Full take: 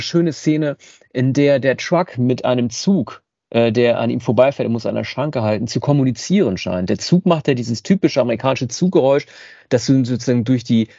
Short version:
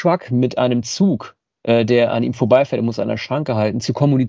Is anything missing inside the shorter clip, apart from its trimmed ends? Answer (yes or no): no